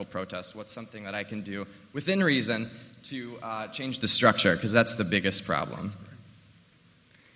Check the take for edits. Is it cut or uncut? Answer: uncut